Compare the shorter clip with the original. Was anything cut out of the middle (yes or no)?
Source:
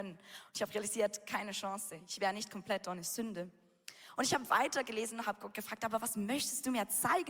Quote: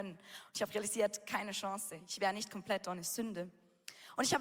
no